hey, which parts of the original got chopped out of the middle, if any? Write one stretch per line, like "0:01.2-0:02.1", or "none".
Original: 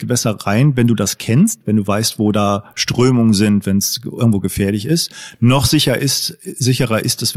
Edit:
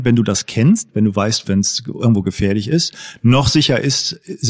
0:02.2-0:03.6